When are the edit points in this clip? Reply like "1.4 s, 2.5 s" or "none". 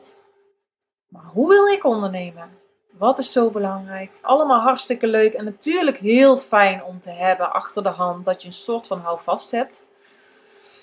2.9 s, 4.2 s